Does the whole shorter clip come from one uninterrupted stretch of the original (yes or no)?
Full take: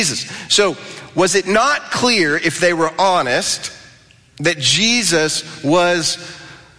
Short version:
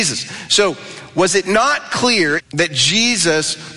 no